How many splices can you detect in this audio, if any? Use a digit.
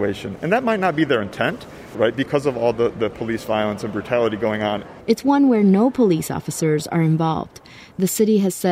2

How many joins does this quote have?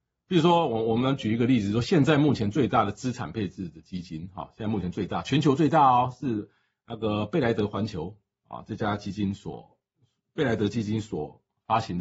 0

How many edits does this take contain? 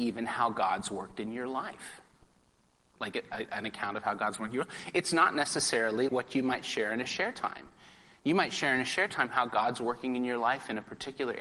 1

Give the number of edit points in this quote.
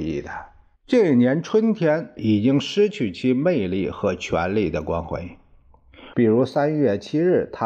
2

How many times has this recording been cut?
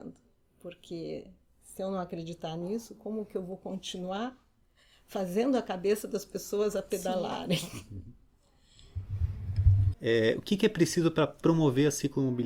1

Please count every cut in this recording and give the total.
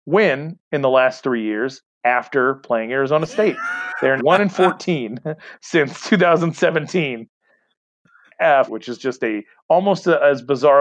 2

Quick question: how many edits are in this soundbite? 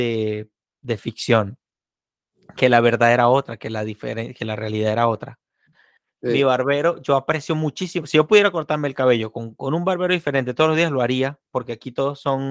1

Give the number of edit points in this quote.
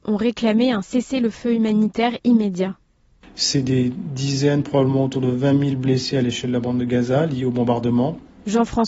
0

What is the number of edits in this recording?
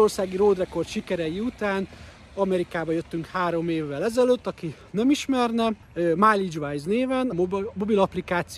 2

